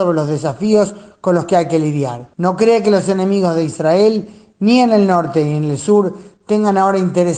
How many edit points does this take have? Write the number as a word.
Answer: one